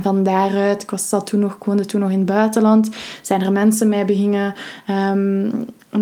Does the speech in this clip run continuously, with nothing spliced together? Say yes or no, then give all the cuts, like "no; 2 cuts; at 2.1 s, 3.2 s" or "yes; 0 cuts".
yes; 0 cuts